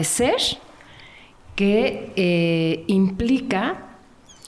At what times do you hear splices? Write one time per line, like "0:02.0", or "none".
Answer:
none